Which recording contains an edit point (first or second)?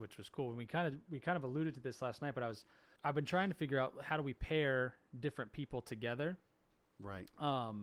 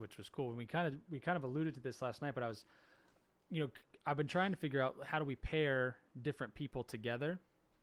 first